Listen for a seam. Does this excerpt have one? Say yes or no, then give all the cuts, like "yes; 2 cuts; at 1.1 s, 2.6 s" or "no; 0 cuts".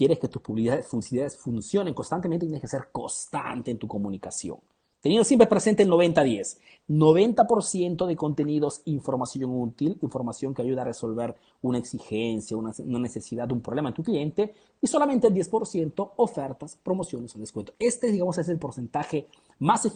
no; 0 cuts